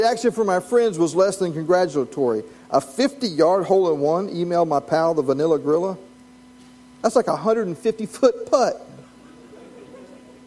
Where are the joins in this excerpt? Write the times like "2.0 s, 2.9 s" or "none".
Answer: none